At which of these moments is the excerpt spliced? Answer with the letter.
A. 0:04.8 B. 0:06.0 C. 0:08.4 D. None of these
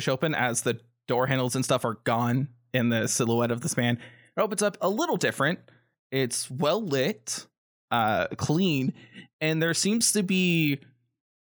A